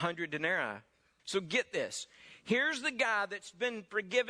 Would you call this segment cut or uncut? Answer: cut